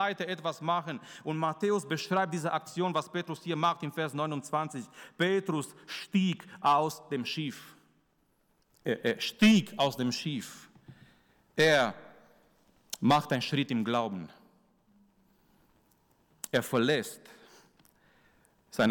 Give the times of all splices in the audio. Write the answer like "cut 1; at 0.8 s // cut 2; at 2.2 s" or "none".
none